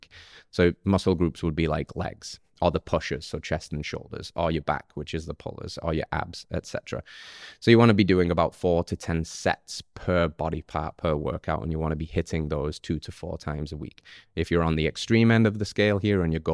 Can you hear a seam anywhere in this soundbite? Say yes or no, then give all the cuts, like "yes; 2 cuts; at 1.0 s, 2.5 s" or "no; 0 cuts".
no; 0 cuts